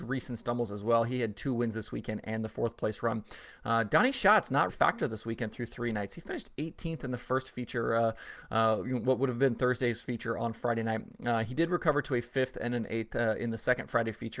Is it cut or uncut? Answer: cut